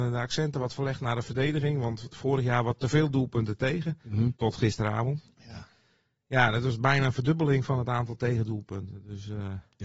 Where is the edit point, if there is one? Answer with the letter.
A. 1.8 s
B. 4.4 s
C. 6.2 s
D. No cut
B